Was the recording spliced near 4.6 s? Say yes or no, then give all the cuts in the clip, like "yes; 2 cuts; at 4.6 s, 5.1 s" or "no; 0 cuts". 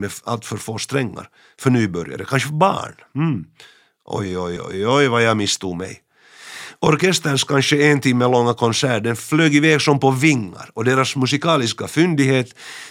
yes; 1 cut; at 4.6 s